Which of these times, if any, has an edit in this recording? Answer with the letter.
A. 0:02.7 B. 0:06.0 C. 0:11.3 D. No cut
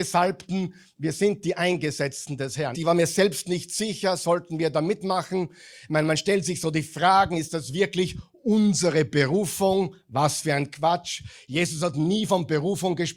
A